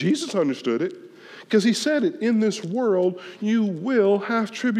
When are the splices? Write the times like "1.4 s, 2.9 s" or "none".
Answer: none

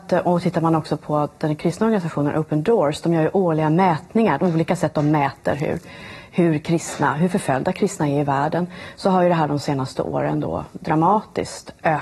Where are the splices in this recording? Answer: 4.4 s

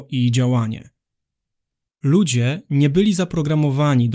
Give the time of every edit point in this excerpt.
1.9 s

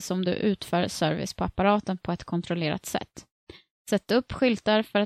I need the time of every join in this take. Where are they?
none

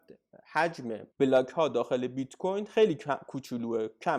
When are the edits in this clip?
1.1 s

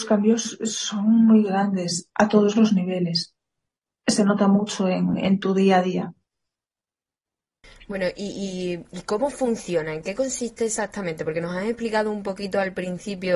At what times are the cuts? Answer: none

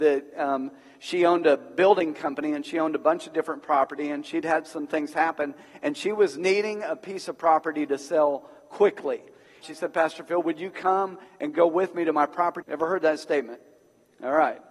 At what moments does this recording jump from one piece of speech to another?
9.6 s, 12.6 s

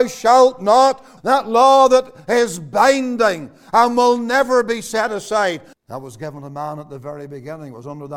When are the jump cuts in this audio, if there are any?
1.2 s, 5.7 s

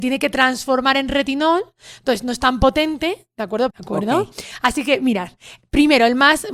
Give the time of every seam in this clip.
3.7 s

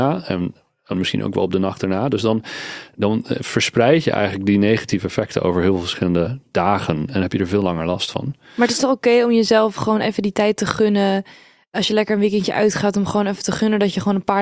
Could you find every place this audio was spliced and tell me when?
0.9 s

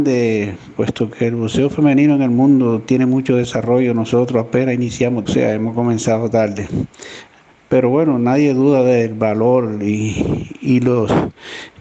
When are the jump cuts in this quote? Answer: 5.3 s

